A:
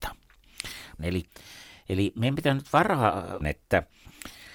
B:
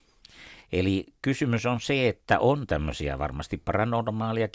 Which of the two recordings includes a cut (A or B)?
A